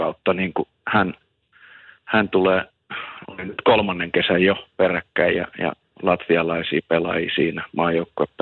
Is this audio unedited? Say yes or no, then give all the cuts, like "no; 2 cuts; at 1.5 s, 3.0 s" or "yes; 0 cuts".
yes; 0 cuts